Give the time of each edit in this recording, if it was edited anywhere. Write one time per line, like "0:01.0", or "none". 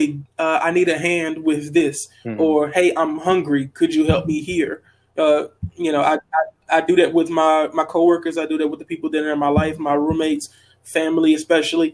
none